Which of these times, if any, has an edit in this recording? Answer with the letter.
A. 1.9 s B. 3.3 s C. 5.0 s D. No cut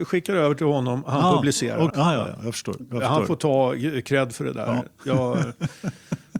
A